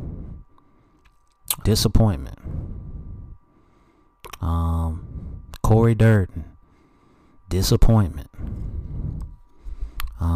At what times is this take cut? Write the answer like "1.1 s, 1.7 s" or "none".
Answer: 1.6 s